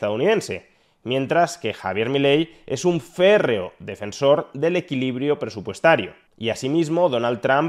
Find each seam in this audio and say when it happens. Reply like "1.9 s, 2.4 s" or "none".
6.3 s